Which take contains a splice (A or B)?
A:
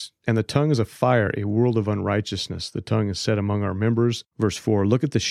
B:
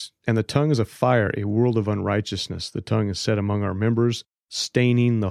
A